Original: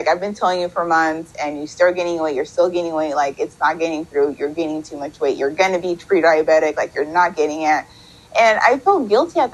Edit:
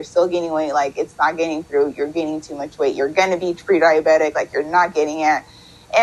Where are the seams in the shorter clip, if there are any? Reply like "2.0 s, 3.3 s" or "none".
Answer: none